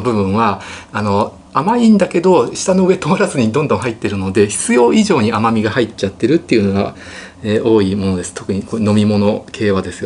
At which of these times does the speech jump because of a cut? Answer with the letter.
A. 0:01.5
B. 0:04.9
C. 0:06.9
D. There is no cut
A